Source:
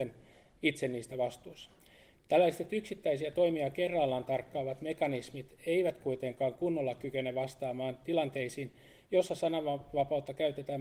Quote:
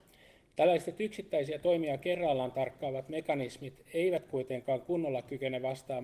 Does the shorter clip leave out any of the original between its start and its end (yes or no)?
no